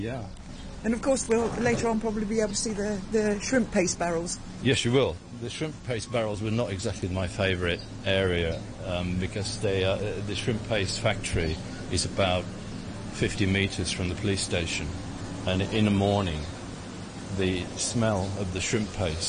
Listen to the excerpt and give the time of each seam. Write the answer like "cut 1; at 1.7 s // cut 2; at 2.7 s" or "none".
none